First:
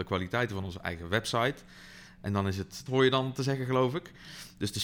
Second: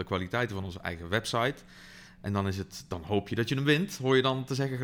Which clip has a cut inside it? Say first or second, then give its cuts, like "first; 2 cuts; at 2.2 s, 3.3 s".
first; 1 cut; at 2.9 s